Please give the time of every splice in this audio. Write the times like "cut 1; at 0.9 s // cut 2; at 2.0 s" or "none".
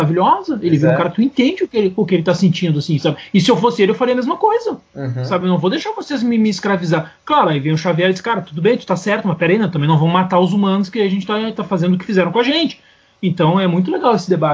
none